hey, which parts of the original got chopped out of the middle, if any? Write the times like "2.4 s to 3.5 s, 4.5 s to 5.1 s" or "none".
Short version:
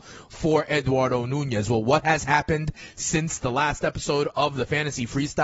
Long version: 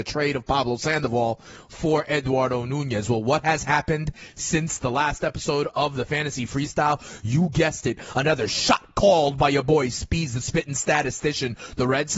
none